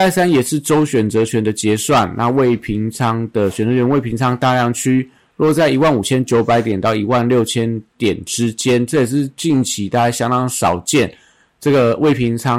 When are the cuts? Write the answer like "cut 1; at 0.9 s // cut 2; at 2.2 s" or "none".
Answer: none